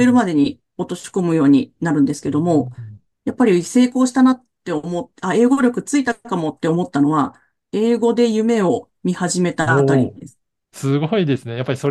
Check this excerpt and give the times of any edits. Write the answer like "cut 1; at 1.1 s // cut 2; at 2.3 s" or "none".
none